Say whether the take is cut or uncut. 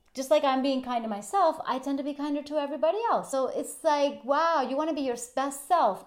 uncut